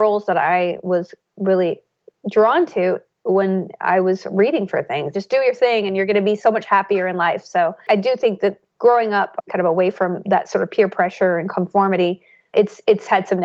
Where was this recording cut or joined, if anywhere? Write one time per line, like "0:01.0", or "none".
0:05.1